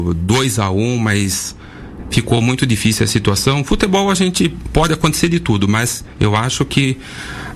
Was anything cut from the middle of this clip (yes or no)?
no